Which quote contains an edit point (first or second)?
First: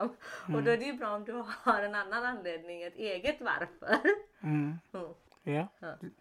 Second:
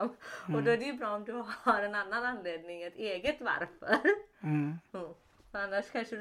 first